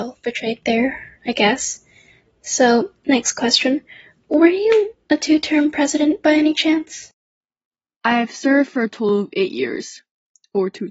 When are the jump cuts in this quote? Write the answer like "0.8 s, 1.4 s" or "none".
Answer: 7.8 s